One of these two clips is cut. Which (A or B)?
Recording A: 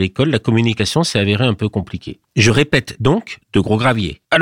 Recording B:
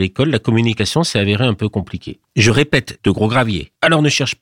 B